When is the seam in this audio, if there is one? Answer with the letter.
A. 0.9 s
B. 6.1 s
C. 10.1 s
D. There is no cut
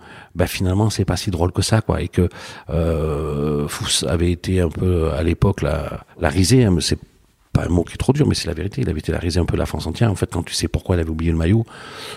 B